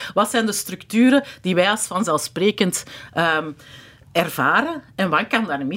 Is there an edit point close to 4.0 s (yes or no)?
yes